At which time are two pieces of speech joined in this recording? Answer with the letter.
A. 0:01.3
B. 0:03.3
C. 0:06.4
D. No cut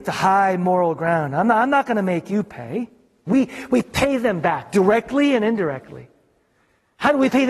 B